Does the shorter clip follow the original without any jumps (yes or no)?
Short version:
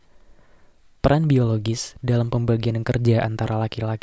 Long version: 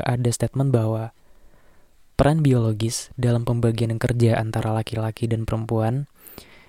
yes